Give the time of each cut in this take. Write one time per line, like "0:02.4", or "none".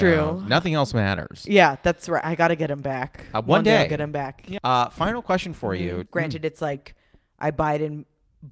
0:04.6
0:06.1